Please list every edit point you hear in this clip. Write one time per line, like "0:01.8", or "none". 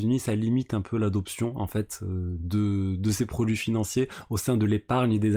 none